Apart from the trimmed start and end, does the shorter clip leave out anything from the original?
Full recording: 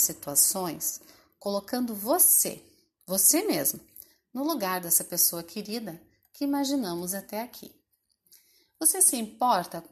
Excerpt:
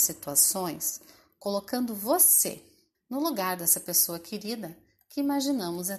yes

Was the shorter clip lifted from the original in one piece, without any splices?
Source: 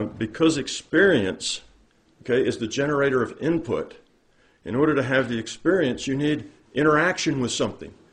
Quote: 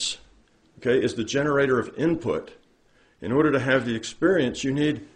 yes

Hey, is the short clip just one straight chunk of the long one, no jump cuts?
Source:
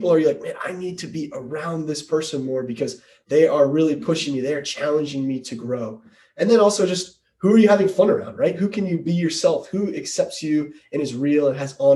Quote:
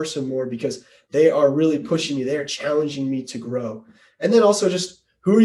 yes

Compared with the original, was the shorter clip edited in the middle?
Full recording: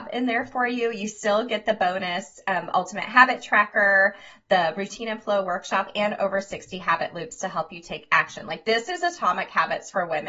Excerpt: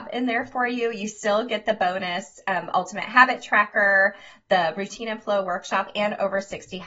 no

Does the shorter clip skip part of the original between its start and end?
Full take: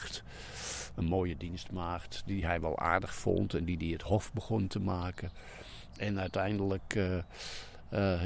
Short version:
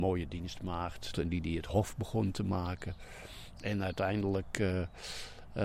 yes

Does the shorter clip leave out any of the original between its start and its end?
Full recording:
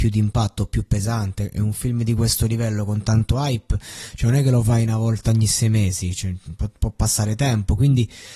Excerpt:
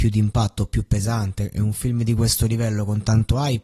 no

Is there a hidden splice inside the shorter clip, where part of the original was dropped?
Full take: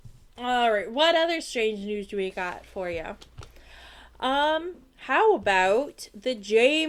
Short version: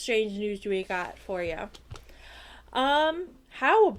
no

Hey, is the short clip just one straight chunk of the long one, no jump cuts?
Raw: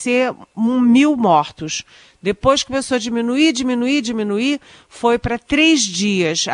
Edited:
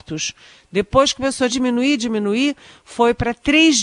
no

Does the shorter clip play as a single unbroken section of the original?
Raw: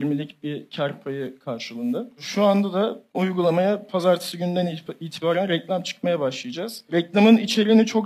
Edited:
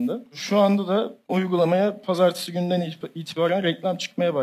yes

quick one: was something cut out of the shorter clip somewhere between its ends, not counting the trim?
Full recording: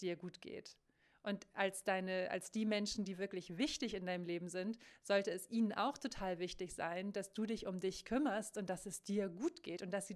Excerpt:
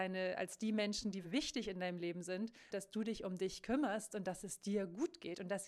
yes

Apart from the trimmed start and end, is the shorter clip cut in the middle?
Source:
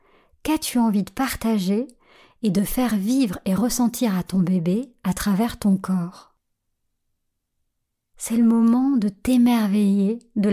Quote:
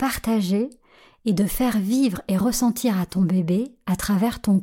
no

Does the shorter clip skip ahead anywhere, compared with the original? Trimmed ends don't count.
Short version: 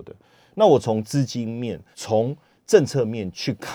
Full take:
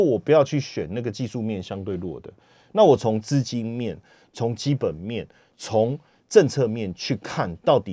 yes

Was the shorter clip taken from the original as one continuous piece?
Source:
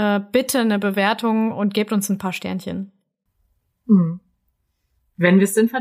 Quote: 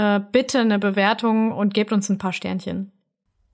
yes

